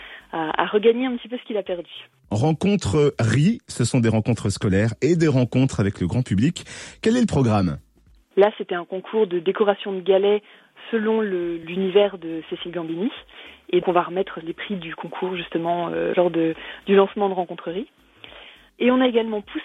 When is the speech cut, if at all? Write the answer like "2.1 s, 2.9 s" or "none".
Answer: 8.3 s, 13.8 s